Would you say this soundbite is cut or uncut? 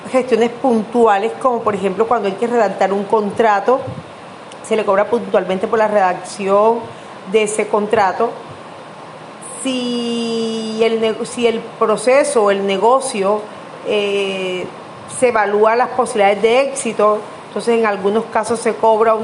uncut